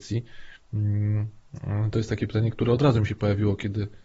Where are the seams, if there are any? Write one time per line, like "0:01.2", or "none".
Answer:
none